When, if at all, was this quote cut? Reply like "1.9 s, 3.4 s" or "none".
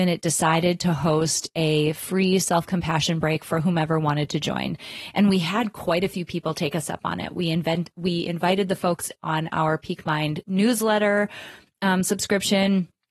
none